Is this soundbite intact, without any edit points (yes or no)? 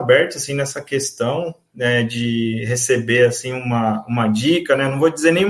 yes